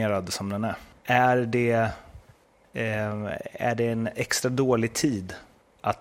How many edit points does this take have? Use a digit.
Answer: 1